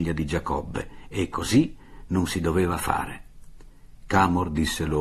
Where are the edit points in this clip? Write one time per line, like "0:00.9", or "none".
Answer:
none

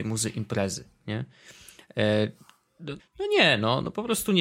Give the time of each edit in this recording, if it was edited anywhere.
0:03.0

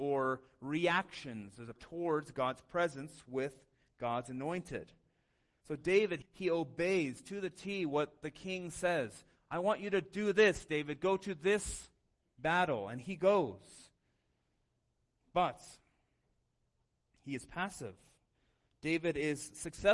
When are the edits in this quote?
0:01.7
0:06.2

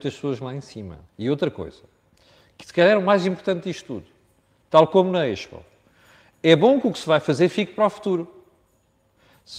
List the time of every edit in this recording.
0:01.1

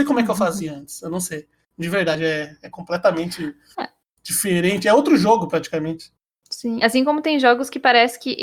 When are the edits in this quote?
none

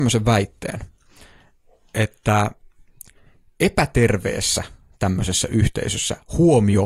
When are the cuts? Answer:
none

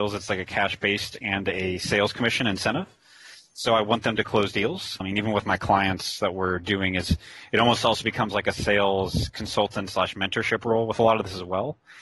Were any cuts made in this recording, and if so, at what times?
0:05.0

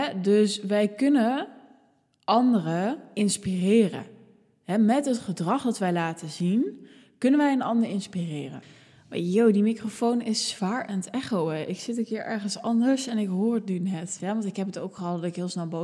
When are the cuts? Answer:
0:14.2

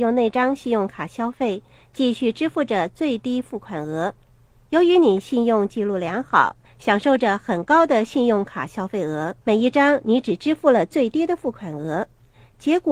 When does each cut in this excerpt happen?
0:06.6
0:09.4

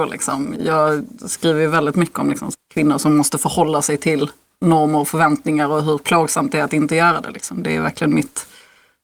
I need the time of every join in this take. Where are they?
0:02.5

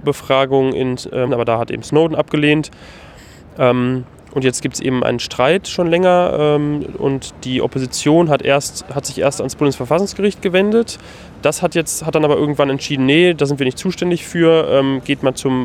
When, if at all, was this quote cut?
0:01.3

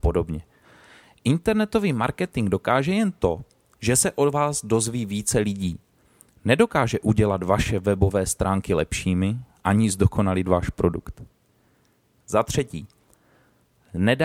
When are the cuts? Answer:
none

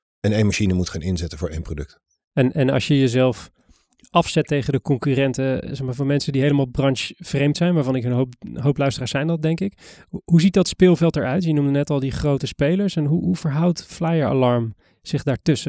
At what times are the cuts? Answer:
none

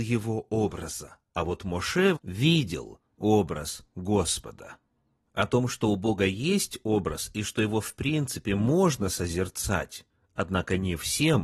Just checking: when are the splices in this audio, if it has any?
0:02.2

